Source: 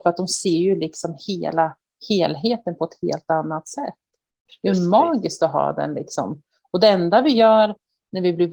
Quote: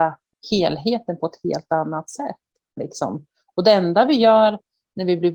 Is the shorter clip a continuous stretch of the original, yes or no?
no